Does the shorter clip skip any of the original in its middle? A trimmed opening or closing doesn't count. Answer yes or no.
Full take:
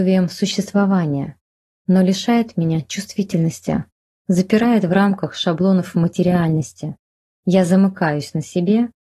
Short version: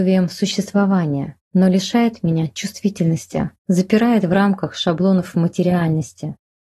yes